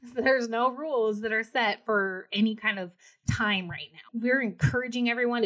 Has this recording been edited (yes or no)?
yes